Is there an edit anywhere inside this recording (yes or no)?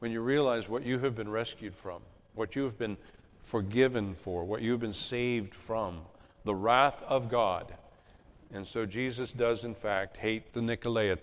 no